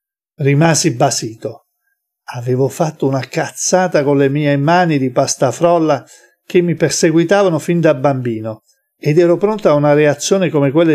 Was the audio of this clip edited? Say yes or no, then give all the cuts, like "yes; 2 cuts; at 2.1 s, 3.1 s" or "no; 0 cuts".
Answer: no; 0 cuts